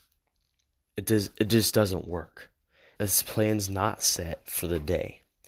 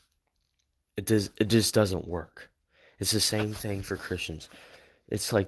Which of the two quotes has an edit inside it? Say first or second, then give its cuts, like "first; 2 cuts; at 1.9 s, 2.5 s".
first; 1 cut; at 3.0 s